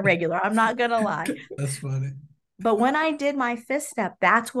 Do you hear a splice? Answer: yes; 1 cut; at 1.6 s

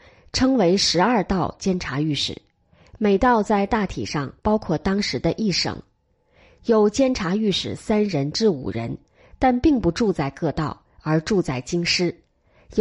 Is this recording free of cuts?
yes; 0 cuts

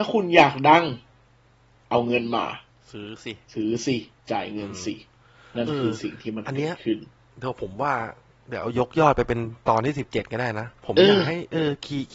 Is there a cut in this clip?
yes; 2 cuts; at 3.4 s, 10.8 s

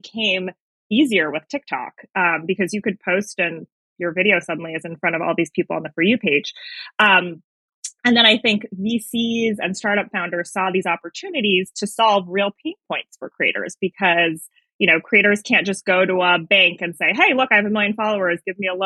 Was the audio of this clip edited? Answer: no; 0 cuts

